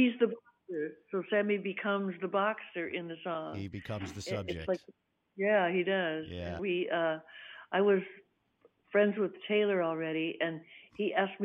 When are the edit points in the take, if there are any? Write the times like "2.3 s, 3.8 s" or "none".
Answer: 6.6 s